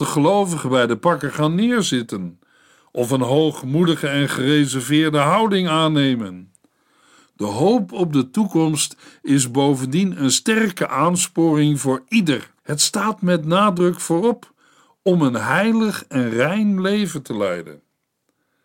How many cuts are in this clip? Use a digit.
1